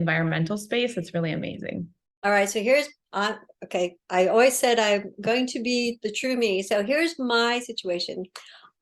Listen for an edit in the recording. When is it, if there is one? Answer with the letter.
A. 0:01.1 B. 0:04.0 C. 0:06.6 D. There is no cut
B